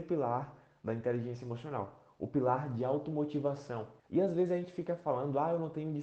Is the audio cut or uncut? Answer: cut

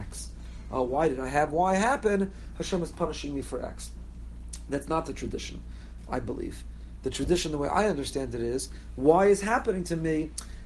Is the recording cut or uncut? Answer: uncut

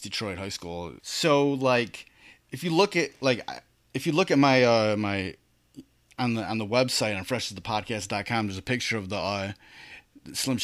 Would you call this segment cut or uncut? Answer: cut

